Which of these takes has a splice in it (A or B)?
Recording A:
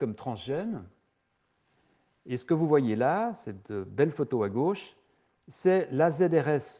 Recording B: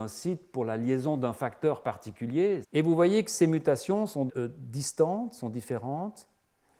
B